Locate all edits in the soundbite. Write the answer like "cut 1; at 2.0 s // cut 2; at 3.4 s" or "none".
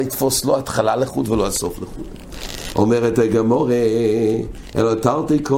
none